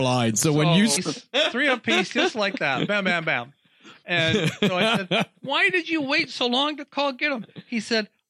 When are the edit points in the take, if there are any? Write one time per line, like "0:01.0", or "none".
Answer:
0:01.0